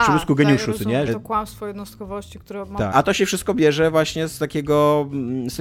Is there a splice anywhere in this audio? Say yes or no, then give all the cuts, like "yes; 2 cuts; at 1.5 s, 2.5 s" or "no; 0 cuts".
yes; 2 cuts; at 1.1 s, 2.9 s